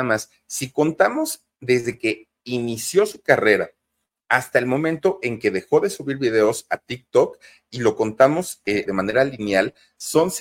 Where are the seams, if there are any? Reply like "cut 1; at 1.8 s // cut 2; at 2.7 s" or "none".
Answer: cut 1; at 8.9 s